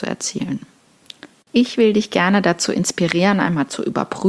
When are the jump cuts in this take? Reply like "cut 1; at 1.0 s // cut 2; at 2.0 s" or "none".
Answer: cut 1; at 1.5 s